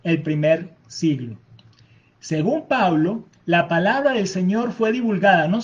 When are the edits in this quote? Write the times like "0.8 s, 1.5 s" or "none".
3.3 s